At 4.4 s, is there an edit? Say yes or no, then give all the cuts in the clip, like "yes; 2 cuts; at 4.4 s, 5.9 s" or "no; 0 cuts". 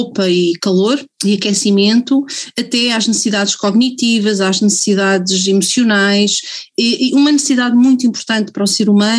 no; 1 cut; at 1.1 s